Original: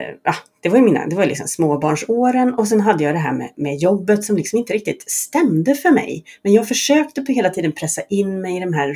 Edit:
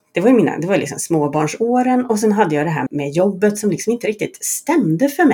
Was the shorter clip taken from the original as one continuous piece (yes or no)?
no